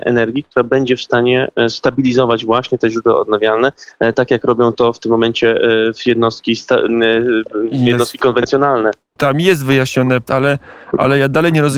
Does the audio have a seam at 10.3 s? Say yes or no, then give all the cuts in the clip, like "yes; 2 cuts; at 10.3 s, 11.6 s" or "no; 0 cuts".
yes; 2 cuts; at 9.2 s, 10.3 s